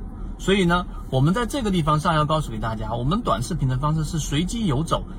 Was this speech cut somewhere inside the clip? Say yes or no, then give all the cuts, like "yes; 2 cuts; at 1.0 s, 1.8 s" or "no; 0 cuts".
no; 0 cuts